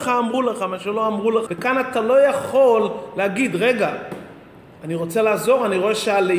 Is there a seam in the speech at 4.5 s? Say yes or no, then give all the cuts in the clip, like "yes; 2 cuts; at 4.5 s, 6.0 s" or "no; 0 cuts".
no; 1 cut; at 1.5 s